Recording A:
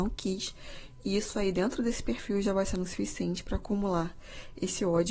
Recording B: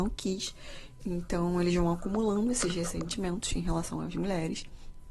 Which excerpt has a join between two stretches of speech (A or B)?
B